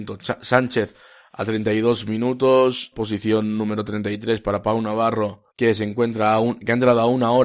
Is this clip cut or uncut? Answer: cut